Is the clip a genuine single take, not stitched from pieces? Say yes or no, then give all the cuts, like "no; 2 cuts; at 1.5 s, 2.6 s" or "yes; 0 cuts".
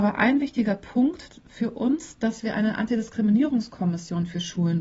yes; 0 cuts